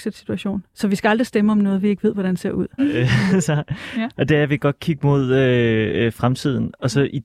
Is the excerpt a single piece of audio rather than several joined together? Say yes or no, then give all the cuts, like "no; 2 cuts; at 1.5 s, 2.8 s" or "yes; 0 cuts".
no; 1 cut; at 2.8 s